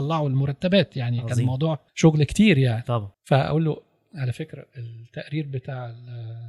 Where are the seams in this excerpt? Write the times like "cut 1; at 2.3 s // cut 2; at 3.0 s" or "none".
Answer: cut 1; at 1.9 s // cut 2; at 3.1 s